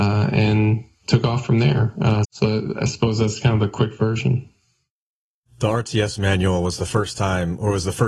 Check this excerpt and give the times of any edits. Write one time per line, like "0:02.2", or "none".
0:02.2